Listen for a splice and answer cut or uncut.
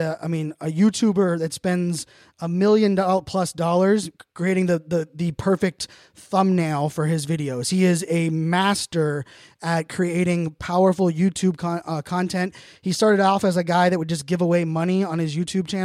uncut